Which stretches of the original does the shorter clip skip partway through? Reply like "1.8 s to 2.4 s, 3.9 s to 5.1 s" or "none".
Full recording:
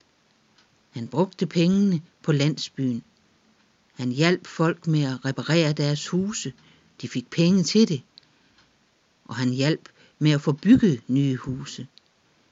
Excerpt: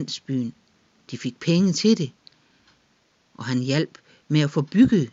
3.5 s to 6.9 s

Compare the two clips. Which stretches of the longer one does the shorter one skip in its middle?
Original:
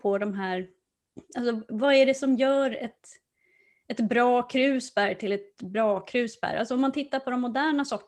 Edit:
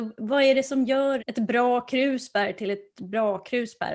2.7 s to 3.8 s

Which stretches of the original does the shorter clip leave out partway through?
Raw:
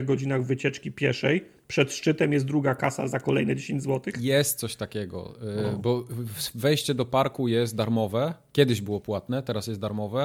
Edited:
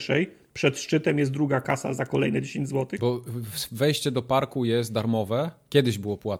4.1 s to 5.8 s

